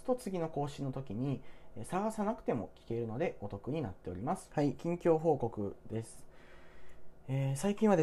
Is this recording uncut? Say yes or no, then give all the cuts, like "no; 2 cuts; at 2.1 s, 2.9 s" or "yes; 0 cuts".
no; 1 cut; at 4.5 s